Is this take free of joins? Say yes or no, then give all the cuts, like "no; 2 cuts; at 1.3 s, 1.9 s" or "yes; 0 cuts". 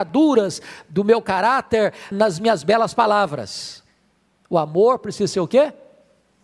no; 1 cut; at 2.1 s